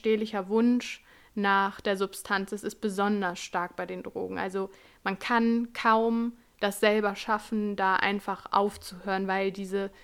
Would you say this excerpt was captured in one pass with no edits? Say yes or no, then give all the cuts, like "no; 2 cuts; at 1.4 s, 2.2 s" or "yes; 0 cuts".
yes; 0 cuts